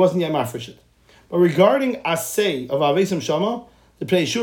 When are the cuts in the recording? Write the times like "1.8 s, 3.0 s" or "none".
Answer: none